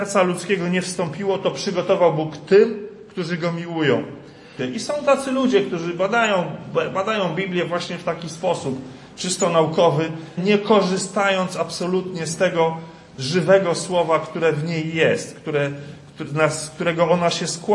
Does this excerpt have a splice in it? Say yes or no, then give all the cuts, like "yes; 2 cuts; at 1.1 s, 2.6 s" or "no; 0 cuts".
yes; 2 cuts; at 4.6 s, 10.4 s